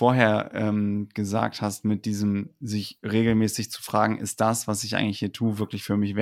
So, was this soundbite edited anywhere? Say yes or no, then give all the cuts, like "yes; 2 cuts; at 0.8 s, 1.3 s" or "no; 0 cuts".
no; 0 cuts